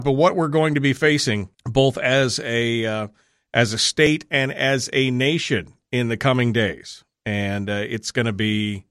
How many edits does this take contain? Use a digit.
1